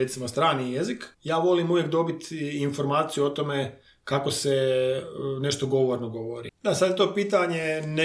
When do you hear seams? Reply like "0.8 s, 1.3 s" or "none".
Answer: 1.1 s, 6.5 s